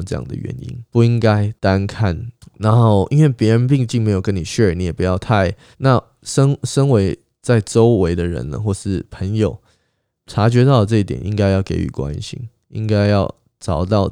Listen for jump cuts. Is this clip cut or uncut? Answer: cut